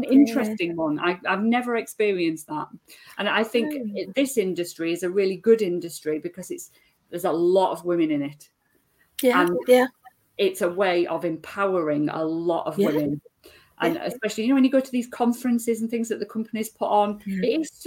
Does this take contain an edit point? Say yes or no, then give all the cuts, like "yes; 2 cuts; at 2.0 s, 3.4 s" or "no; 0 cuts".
no; 0 cuts